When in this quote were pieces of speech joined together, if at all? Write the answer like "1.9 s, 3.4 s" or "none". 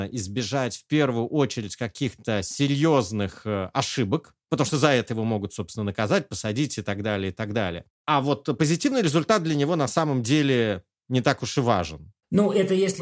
none